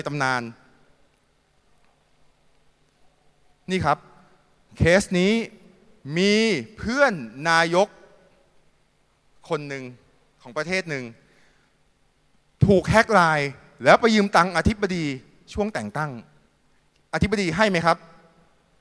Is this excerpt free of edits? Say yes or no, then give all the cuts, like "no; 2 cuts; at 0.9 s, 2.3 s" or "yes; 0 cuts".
yes; 0 cuts